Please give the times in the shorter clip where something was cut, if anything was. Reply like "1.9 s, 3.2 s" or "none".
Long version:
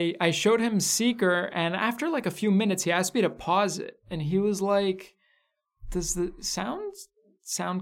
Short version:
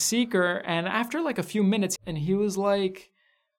2.0 s